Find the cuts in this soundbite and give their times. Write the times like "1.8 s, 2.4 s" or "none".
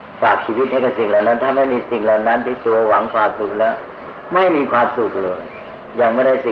none